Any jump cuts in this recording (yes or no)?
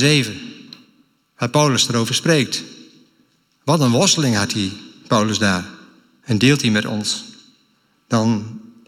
yes